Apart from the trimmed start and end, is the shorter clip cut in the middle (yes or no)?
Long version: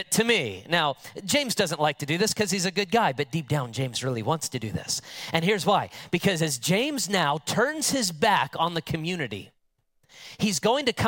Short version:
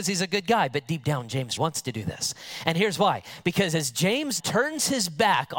yes